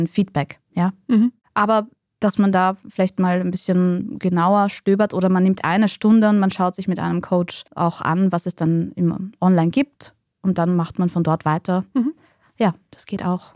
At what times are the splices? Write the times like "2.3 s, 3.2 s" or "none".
none

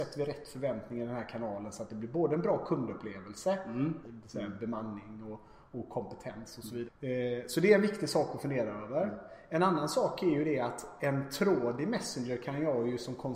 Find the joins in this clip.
4.0 s, 6.8 s

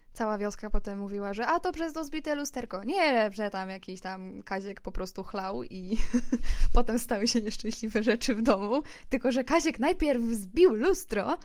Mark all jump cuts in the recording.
none

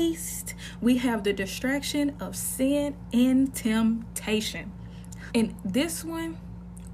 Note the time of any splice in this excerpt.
5.3 s

